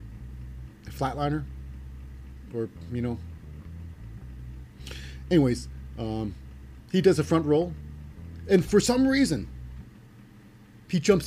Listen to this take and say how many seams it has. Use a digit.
0